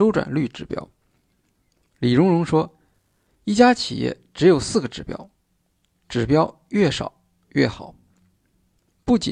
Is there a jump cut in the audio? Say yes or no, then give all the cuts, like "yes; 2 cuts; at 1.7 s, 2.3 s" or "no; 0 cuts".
no; 0 cuts